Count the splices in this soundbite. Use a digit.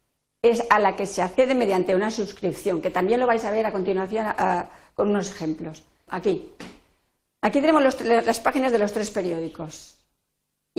1